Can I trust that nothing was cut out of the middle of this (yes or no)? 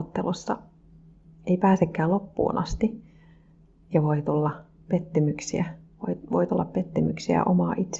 yes